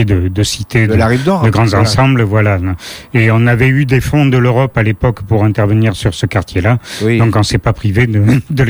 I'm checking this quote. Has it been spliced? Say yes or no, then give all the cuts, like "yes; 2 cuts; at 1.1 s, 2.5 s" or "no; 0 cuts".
no; 0 cuts